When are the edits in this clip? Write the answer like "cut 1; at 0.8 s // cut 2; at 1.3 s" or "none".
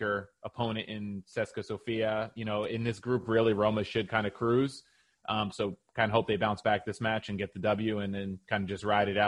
none